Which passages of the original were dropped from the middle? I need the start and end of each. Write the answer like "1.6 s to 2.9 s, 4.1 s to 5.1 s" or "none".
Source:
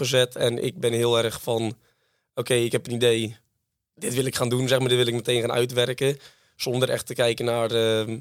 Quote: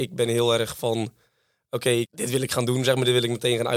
2.7 s to 3.9 s